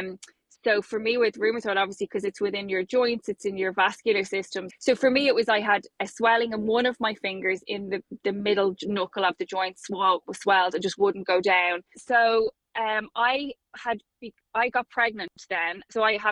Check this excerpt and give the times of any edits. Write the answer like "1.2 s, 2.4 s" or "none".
4.7 s, 11.9 s